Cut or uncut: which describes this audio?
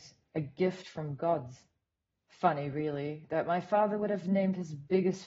uncut